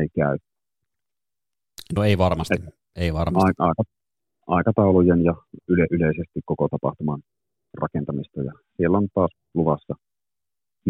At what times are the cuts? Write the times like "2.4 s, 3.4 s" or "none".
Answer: none